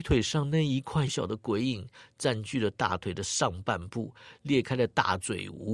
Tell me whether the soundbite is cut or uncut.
cut